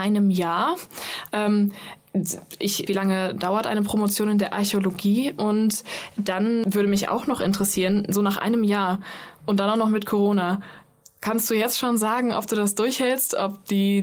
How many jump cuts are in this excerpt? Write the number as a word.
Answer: one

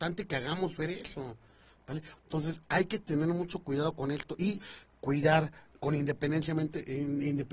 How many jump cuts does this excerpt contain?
one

